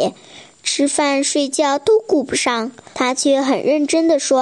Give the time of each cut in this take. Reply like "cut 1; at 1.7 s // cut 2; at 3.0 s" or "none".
cut 1; at 2.9 s